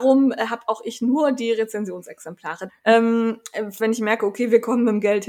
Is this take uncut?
no; 2 cuts; at 2.7 s, 3.8 s

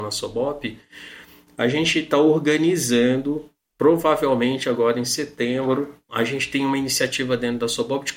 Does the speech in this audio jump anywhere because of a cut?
no; 0 cuts

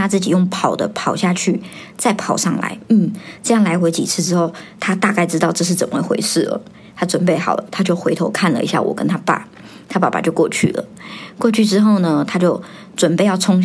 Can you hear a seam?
yes; 1 cut; at 4.7 s

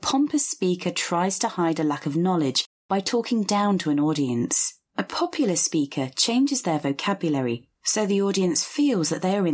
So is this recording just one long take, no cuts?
no; 1 cut; at 4.9 s

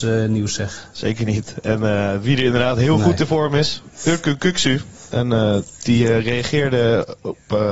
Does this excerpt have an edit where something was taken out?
no; 0 cuts

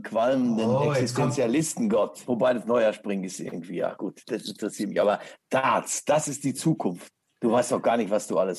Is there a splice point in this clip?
yes; 1 cut; at 2.2 s

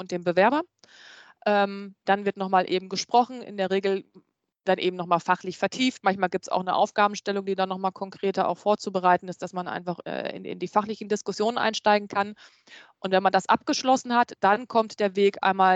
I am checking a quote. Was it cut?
no; 0 cuts

